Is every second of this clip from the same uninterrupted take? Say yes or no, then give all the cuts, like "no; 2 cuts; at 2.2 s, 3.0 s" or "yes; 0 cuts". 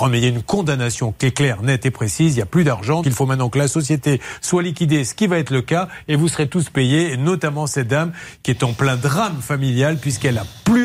no; 1 cut; at 3.0 s